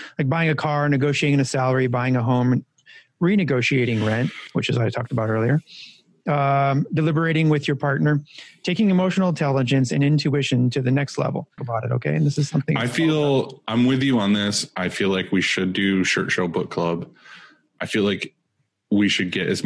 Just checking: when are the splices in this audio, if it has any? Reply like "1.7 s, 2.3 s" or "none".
11.6 s